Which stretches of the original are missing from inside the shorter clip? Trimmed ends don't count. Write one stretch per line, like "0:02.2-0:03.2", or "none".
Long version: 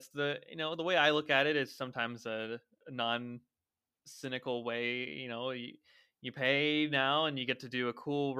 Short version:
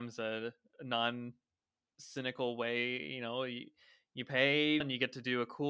0:06.9-0:07.3